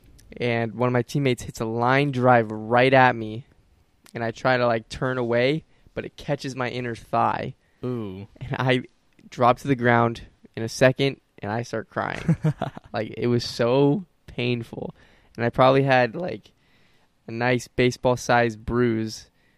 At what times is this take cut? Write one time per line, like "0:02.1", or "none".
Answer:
none